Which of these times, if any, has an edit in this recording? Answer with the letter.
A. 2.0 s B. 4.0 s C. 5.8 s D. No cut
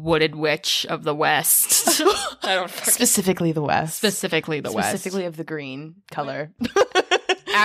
D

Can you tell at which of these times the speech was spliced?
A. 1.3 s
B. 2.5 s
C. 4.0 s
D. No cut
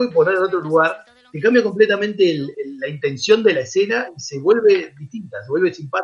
B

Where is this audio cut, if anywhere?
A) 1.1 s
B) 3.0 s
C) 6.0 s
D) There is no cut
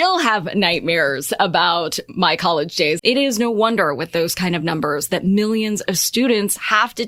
B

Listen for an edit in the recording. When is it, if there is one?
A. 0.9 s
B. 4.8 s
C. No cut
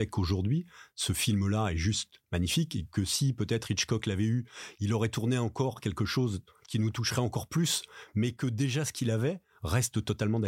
C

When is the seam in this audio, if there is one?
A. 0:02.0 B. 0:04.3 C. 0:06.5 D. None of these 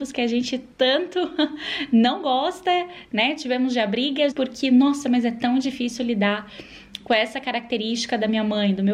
B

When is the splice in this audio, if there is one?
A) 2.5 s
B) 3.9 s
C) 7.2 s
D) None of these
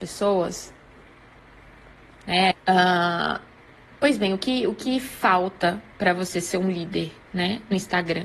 A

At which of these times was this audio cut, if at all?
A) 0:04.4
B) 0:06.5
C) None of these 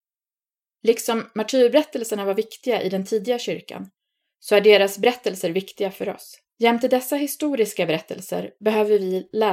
B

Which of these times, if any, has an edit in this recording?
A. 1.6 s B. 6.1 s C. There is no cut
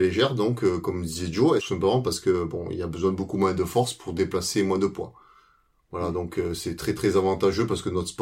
A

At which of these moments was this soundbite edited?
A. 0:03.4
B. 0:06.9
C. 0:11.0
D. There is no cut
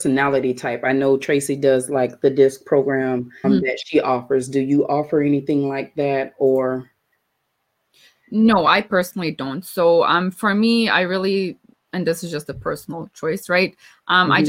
A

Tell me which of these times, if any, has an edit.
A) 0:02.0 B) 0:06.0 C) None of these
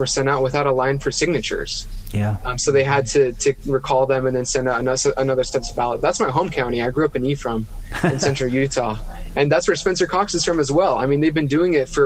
C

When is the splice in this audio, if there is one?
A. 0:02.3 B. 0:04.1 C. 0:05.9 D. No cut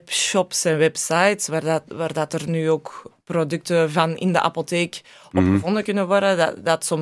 D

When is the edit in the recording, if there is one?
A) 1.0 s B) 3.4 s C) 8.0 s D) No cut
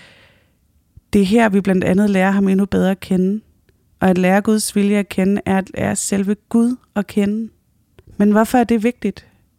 C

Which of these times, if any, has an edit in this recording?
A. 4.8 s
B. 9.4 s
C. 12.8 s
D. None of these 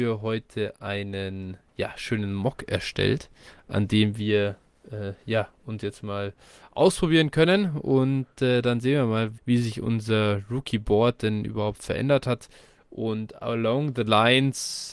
B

